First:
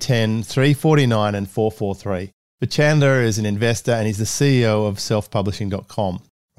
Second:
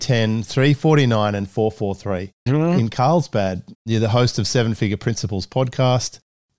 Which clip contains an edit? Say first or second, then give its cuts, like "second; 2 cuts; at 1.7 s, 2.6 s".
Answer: second; 2 cuts; at 2.5 s, 3.7 s